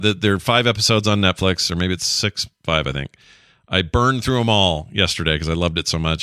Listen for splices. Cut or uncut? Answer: uncut